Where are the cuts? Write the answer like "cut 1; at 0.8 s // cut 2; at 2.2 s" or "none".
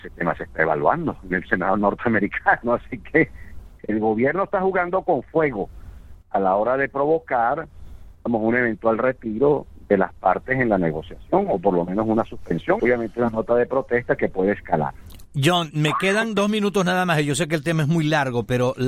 cut 1; at 12.8 s // cut 2; at 15.7 s